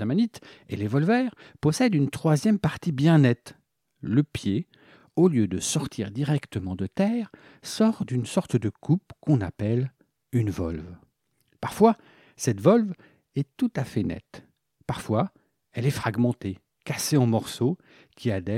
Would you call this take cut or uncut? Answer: uncut